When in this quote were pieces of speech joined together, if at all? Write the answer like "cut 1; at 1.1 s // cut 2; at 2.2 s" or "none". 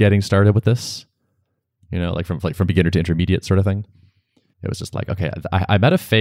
cut 1; at 4.5 s